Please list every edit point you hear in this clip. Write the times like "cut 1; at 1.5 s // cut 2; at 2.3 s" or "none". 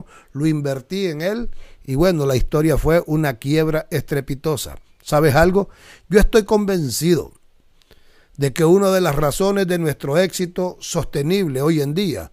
none